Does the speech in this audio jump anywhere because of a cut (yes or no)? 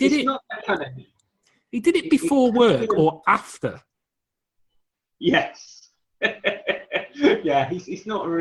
no